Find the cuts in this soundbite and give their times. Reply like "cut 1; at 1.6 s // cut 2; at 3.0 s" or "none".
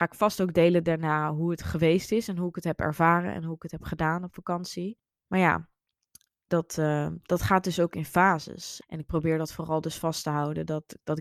cut 1; at 5.2 s // cut 2; at 8.8 s